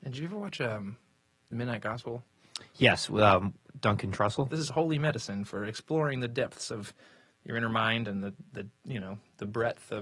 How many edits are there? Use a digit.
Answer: 1